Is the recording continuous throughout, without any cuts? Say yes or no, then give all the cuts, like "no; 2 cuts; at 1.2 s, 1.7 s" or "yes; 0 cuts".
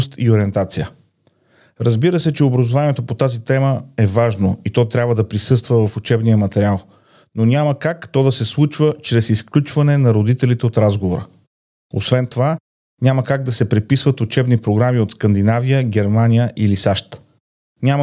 yes; 0 cuts